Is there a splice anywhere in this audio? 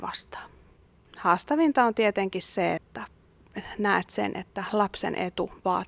yes; 2 cuts; at 1.1 s, 2.8 s

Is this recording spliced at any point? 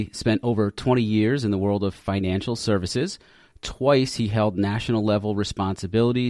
no; 0 cuts

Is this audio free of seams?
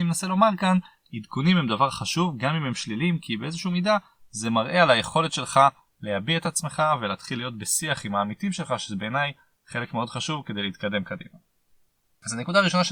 yes; 0 cuts

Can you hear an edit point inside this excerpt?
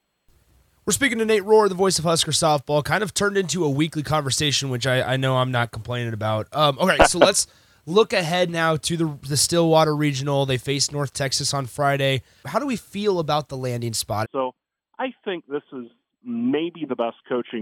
yes; 1 cut; at 14.2 s

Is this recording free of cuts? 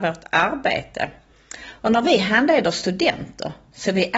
yes; 0 cuts

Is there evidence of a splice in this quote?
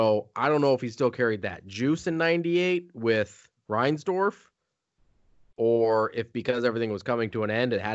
no; 0 cuts

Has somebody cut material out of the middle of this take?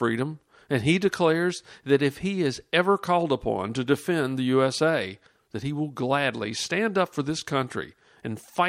yes; 1 cut; at 5.4 s

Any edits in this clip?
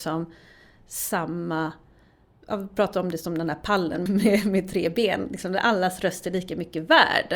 yes; 1 cut; at 4.1 s

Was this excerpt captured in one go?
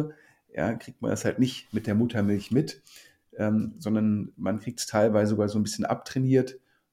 yes; 0 cuts

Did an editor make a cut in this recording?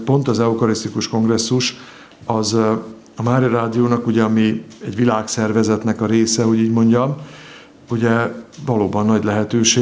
no; 0 cuts

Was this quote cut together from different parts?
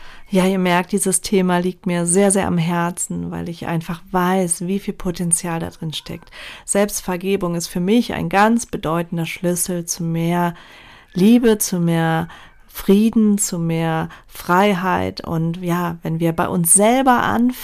no; 0 cuts

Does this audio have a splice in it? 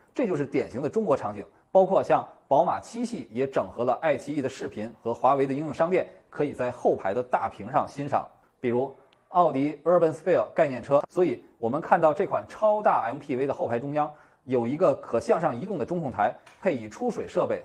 yes; 3 cuts; at 1.6 s, 8.5 s, 11.0 s

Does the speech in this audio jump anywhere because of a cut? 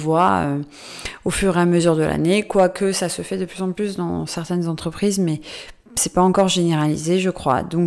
no; 0 cuts

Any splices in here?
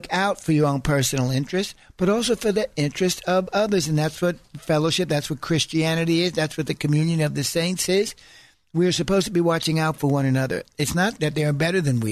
no; 0 cuts

